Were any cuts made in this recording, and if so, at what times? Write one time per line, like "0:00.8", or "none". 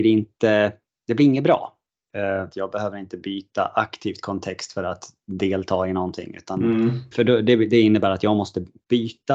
0:02.5
0:07.1